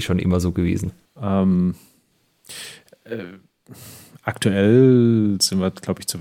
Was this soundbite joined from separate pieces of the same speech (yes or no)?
yes